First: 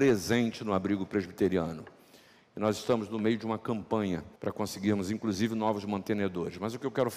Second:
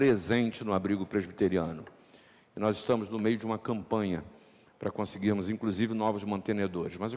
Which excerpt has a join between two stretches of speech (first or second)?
first